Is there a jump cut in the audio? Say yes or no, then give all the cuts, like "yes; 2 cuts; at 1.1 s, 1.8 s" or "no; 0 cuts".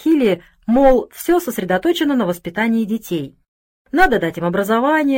no; 0 cuts